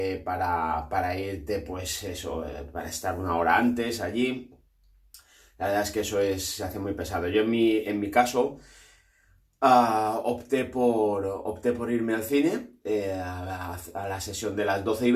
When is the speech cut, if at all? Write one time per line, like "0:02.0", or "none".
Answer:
none

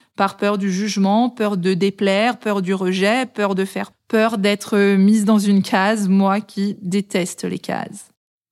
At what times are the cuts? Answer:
0:03.9

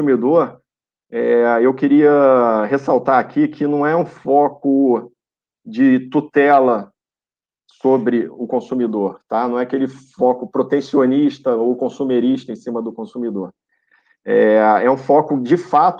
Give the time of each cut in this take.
none

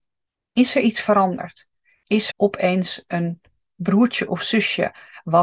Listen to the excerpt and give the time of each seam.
0:02.3

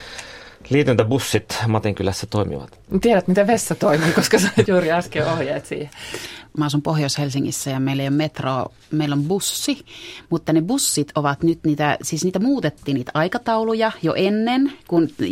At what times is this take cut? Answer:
0:04.7
0:06.5

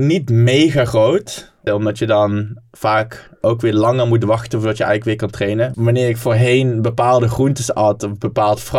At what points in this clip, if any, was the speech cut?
0:01.7
0:05.7

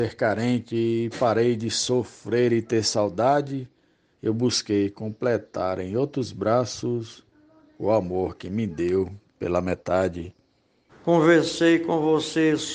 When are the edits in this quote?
0:04.1
0:10.9

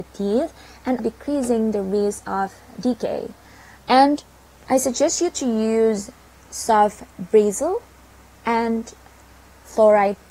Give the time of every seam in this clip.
0:01.0
0:03.8

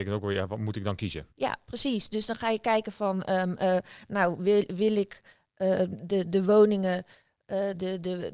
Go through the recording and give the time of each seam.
0:01.3

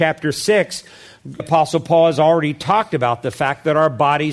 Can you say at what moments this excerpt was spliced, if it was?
0:01.4

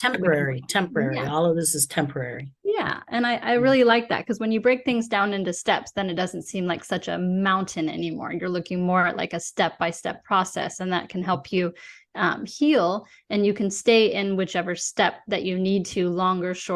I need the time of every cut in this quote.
none

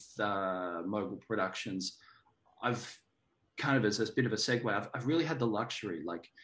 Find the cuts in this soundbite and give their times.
none

